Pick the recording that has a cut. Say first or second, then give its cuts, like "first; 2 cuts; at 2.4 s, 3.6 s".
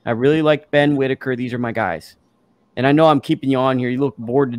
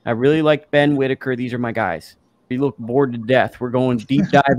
second; 1 cut; at 2.5 s